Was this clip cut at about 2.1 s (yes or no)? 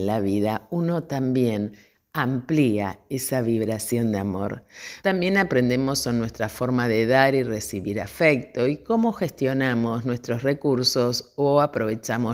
no